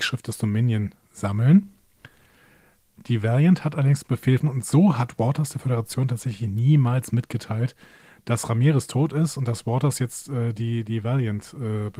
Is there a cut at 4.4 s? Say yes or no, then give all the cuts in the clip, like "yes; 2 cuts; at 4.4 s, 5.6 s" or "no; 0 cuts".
yes; 1 cut; at 4.4 s